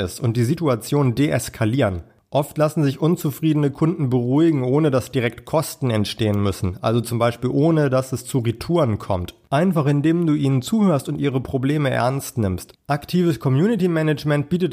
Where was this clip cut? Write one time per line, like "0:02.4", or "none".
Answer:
0:12.7